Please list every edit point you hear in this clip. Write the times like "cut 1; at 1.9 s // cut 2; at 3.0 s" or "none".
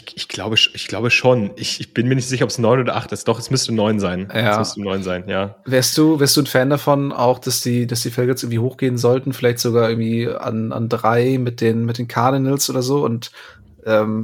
none